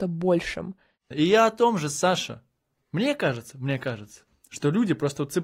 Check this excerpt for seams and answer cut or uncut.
cut